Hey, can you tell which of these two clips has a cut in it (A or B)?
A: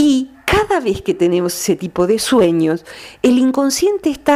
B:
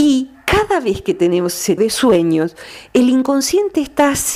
B